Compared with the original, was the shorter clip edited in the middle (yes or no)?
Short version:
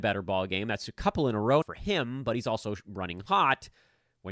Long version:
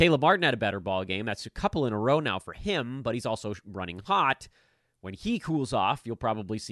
yes